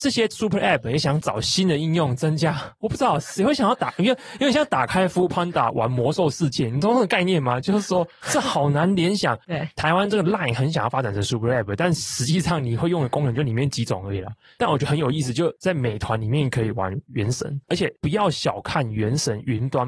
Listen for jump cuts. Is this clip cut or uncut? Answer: cut